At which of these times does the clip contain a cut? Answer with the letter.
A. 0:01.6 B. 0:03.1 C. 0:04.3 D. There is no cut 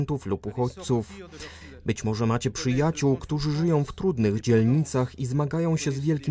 A